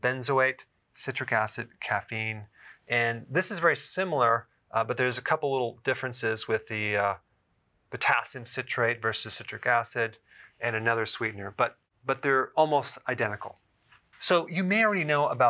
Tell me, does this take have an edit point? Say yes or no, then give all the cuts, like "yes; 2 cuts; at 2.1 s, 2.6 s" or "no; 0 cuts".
yes; 1 cut; at 14.1 s